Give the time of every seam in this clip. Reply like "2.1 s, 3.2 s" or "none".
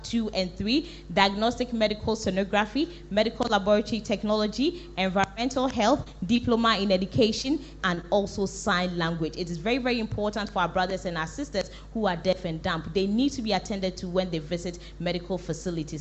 7.8 s

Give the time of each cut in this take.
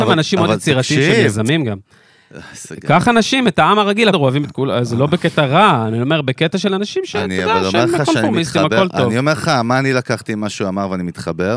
4.1 s

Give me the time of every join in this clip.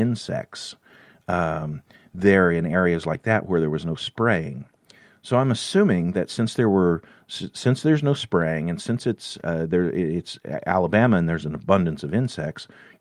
none

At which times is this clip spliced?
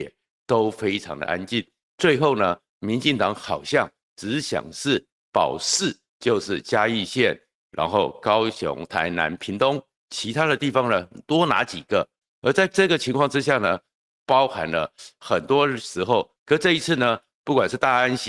12.2 s, 14.0 s, 16.4 s

